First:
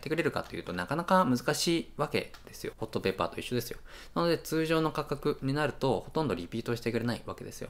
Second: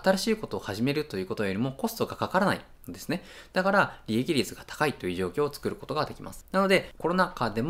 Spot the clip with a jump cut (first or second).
first